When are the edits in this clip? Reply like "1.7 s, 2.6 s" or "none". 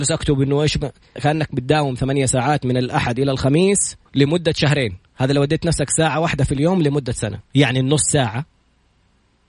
1.2 s, 4.1 s, 7.4 s